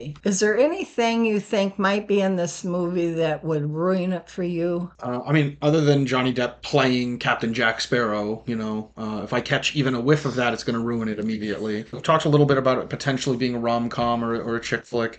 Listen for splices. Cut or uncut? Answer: uncut